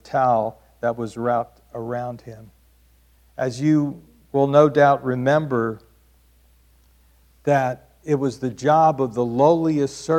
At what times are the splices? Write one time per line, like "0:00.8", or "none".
none